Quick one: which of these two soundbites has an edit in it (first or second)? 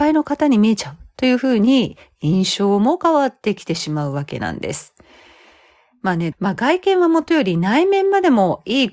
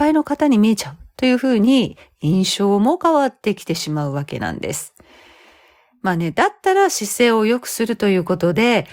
first